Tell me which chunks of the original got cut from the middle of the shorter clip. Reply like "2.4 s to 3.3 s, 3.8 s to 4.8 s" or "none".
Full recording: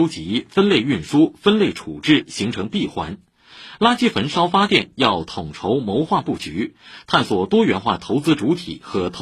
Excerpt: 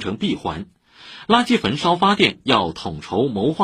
none

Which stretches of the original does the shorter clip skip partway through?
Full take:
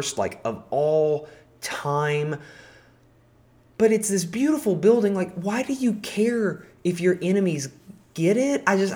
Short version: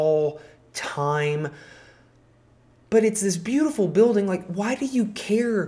none

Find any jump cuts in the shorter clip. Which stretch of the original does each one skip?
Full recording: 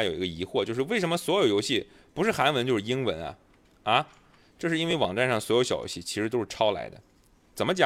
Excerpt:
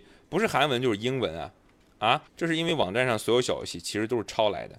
4.1 s to 4.5 s

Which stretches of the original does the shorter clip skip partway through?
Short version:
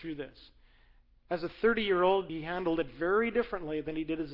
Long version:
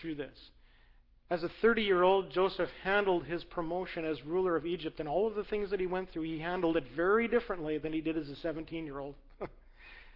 2.3 s to 6.3 s

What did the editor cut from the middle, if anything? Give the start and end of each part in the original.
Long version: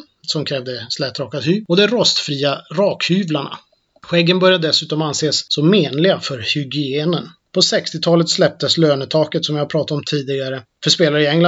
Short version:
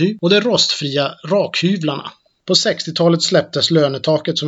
3.9 s to 7.5 s

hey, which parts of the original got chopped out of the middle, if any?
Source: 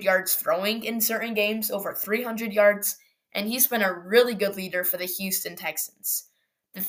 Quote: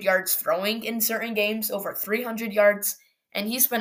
none

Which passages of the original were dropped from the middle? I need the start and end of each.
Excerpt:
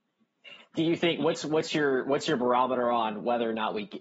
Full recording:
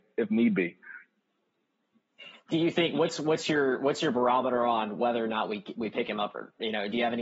none

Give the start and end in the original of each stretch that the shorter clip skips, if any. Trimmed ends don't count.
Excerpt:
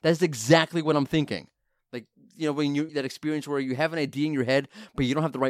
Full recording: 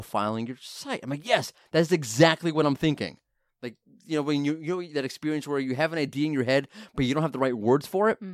4.6 s to 4.9 s

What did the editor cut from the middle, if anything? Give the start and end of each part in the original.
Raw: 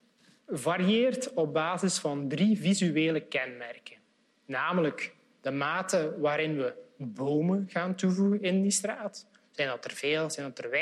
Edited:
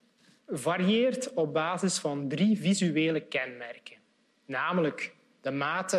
none

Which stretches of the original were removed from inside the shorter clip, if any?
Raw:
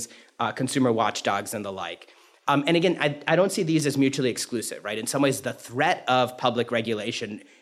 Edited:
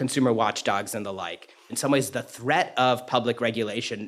2.3 s to 5.0 s

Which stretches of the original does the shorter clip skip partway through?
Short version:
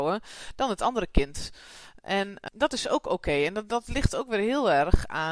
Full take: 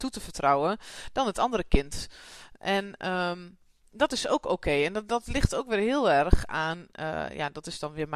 3.0 s to 3.9 s

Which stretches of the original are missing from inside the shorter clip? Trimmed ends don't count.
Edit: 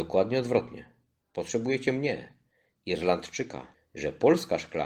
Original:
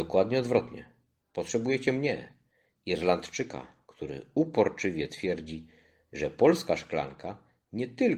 3.7 s to 5.9 s

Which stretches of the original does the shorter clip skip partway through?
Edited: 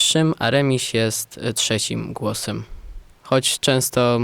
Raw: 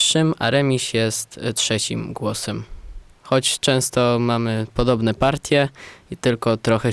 none

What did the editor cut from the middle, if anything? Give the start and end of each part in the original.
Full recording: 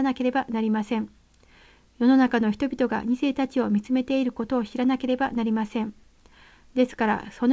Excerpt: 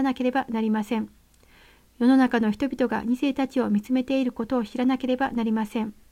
none

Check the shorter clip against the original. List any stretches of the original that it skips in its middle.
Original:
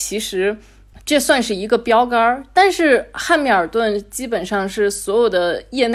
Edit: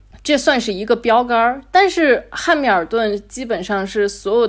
none

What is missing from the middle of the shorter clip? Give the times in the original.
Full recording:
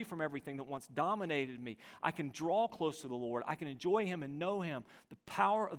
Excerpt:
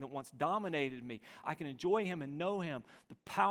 2.0 s to 3.4 s

